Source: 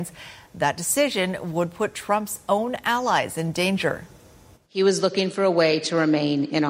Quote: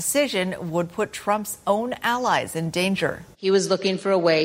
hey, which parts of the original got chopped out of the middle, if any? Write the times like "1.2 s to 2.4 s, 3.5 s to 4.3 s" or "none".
4.1 s to 4.6 s